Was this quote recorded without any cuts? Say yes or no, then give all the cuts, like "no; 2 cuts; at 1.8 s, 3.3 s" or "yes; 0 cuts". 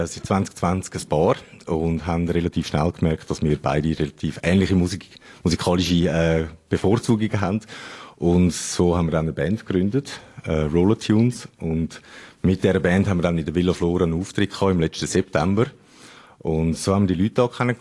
yes; 0 cuts